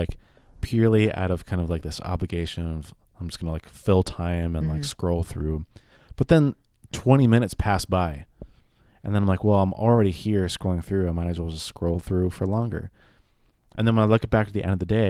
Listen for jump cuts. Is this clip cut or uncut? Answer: uncut